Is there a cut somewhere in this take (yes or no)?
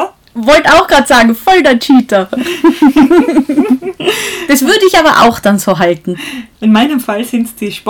yes